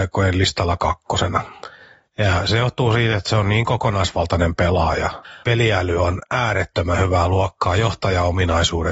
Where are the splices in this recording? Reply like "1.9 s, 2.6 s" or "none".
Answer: 5.4 s